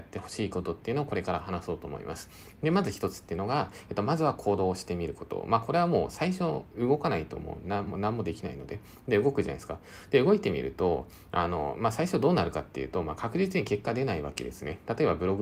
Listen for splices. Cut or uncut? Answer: uncut